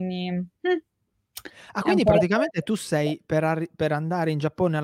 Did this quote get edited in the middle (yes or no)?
no